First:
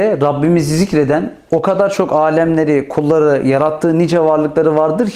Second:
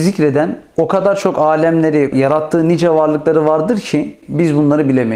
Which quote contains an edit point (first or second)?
second